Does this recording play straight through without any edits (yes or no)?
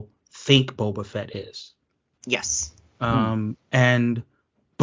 yes